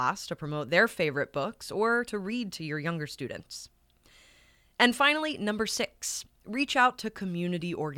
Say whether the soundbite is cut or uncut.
uncut